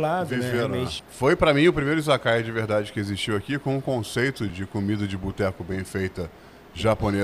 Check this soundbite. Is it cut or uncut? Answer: cut